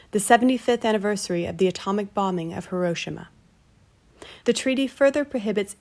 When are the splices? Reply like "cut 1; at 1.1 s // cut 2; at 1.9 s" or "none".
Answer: cut 1; at 4.4 s